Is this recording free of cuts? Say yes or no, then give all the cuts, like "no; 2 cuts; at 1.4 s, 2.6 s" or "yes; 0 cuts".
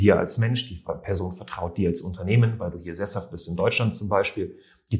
yes; 0 cuts